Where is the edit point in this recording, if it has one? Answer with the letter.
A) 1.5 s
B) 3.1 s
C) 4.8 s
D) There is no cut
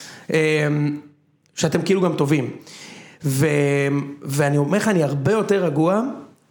D